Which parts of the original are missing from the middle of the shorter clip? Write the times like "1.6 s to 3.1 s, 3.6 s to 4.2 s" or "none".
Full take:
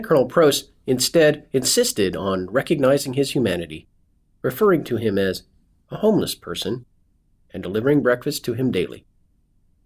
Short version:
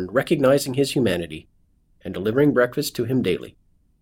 4.3 s to 7.4 s